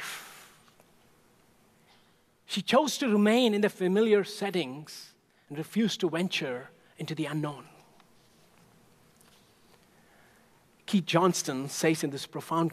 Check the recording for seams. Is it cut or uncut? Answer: uncut